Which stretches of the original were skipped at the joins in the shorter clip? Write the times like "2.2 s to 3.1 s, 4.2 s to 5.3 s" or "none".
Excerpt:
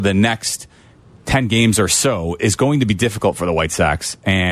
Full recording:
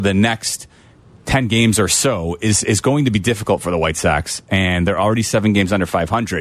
2.4 s to 2.6 s

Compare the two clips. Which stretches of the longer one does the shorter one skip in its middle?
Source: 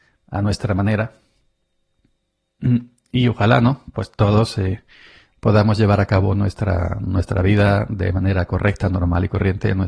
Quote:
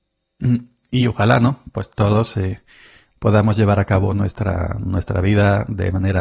none

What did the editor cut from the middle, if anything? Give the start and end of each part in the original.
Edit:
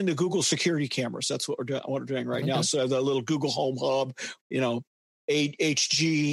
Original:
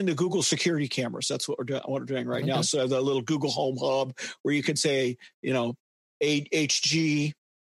4.4 s to 5.3 s

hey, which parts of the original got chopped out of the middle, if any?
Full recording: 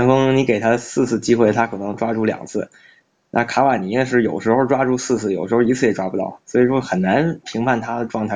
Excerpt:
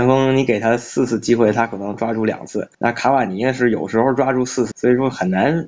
2.7 s to 3.3 s, 5.2 s to 6.4 s

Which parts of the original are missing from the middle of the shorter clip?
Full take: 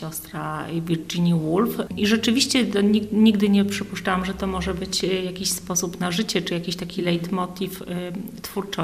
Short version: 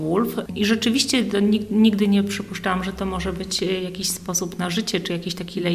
none

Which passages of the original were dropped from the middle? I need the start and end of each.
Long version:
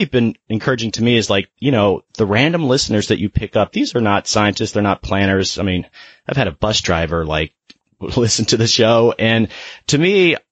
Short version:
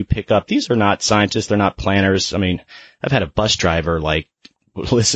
none

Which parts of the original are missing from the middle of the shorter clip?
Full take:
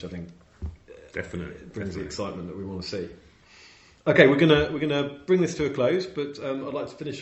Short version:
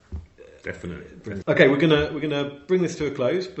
1.9 s to 4.0 s

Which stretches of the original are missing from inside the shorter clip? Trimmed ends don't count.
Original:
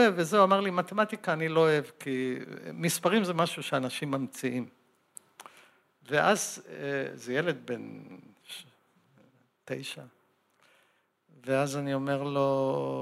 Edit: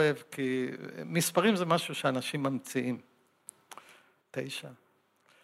5.9 s to 9.5 s

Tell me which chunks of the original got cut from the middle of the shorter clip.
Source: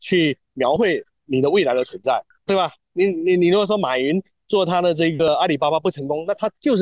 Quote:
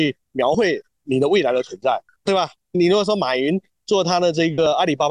3.0 s to 3.4 s

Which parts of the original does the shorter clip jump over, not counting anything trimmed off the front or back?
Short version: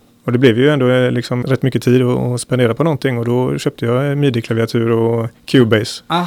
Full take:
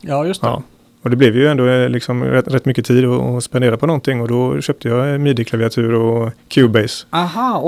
2.2 s to 2.4 s

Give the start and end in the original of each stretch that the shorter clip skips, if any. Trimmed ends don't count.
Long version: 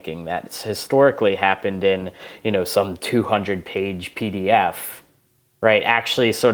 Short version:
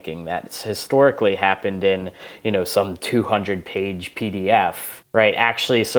5.0 s to 5.5 s

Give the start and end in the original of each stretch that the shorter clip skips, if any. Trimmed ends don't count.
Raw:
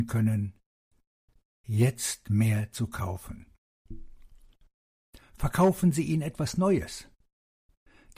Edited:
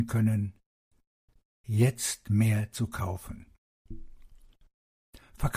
none

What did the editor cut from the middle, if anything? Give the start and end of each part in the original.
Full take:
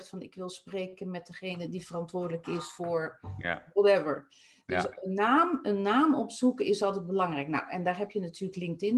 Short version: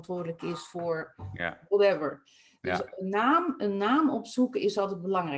none

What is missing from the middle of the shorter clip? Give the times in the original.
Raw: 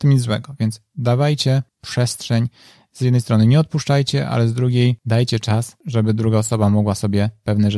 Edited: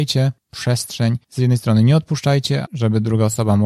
2.5 s to 2.9 s, 4.3 s to 5.8 s

